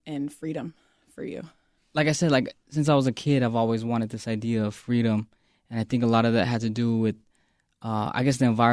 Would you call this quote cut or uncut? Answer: uncut